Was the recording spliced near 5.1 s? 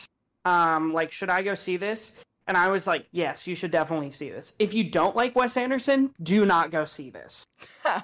no; 1 cut; at 3.1 s

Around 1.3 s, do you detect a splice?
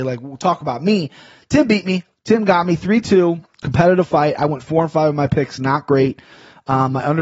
no; 0 cuts

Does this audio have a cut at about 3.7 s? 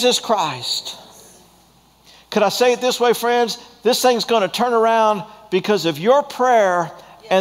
no; 0 cuts

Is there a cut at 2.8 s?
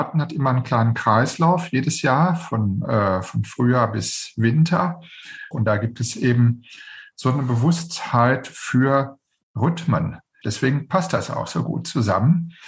no; 2 cuts; at 5.5 s, 10.4 s

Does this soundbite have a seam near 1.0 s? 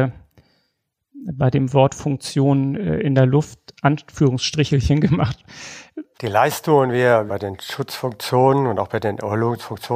no; 2 cuts; at 6.1 s, 7.3 s

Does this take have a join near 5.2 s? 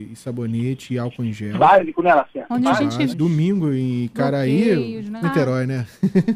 yes; 2 cuts; at 3.1 s, 5.2 s

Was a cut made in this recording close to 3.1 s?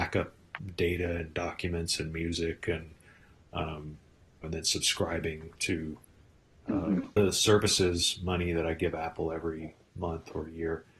no; 2 cuts; at 4.4 s, 7.2 s

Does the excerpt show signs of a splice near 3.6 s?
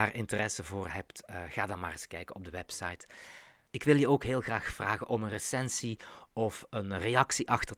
no; 0 cuts

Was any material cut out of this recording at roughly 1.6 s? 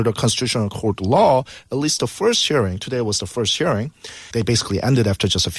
no; 1 cut; at 4.3 s

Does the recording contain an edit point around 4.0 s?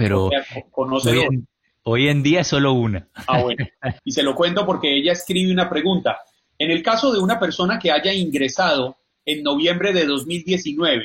yes; 1 cut; at 4.0 s

